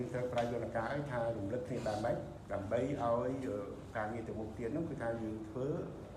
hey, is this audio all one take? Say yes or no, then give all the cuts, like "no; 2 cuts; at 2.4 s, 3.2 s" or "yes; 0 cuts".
yes; 0 cuts